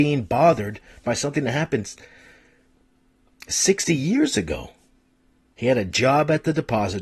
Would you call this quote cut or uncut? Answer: cut